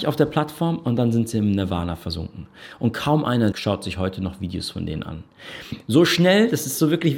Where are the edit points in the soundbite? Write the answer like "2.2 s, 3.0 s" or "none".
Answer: 3.5 s

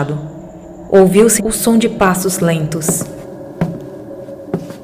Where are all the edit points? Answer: 1.4 s

